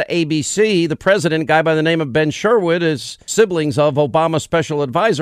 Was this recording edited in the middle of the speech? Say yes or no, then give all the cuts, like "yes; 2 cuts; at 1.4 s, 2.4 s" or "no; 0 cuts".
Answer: no; 0 cuts